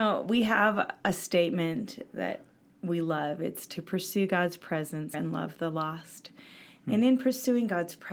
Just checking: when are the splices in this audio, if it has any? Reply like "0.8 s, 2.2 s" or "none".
5.1 s